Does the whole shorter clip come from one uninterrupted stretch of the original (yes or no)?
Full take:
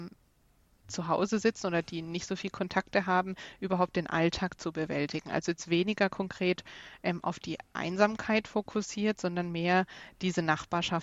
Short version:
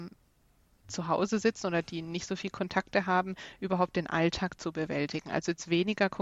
yes